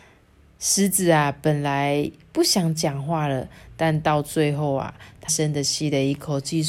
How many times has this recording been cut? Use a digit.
1